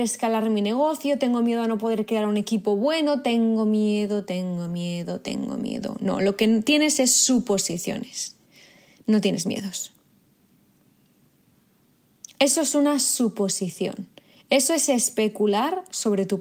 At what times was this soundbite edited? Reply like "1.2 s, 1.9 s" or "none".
none